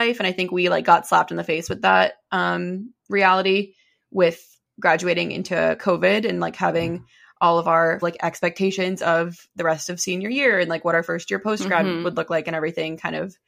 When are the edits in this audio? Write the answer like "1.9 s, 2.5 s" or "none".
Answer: 8.0 s